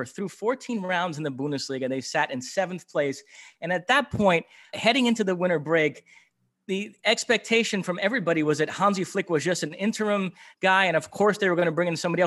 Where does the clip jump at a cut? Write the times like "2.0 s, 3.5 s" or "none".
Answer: 4.7 s